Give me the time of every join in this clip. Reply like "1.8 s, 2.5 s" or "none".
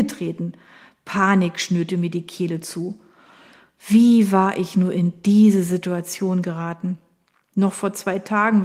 none